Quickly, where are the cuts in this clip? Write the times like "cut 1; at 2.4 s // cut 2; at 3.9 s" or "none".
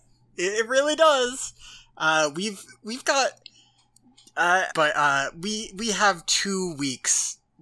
cut 1; at 4.7 s